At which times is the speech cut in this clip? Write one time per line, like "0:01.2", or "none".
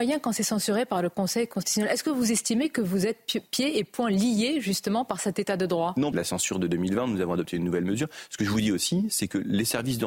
0:06.1